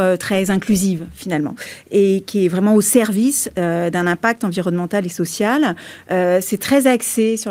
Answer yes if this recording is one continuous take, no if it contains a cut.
yes